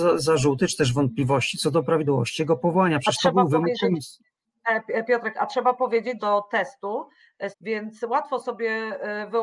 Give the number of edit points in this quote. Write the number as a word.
two